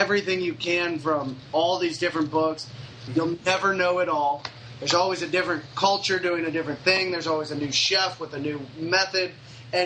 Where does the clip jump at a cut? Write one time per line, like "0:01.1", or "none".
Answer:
0:03.1

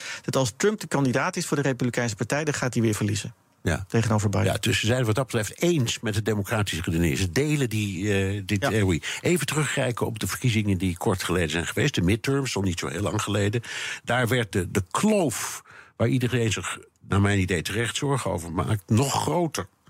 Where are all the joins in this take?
0:14.5

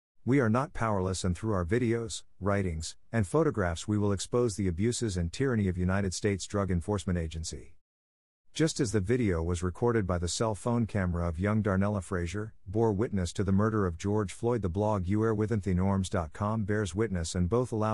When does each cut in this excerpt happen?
none

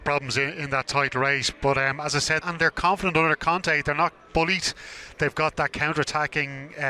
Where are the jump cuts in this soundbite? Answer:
0:02.4

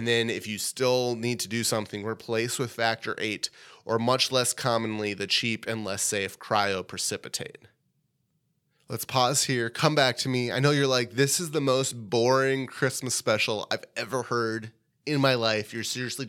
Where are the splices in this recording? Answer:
none

